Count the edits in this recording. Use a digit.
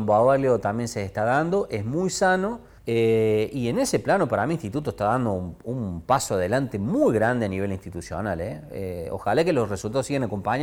1